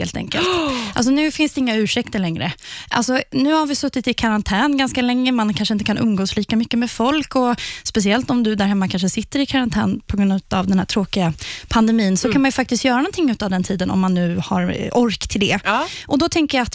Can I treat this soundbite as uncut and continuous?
yes; 0 cuts

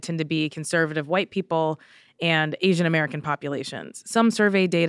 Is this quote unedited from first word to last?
yes; 0 cuts

